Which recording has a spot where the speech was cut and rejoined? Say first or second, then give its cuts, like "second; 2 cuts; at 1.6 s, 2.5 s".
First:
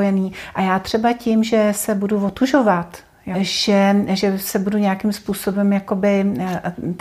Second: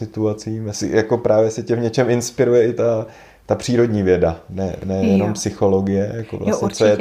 first; 1 cut; at 3.3 s